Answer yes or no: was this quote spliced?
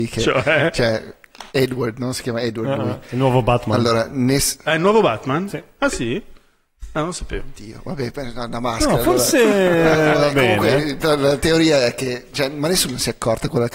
yes